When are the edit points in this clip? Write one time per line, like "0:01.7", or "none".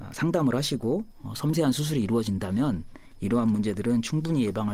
none